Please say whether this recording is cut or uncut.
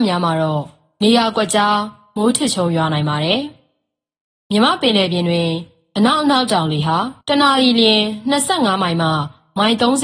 cut